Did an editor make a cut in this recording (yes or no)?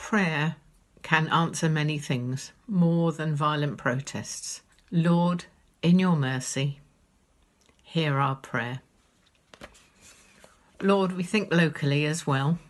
yes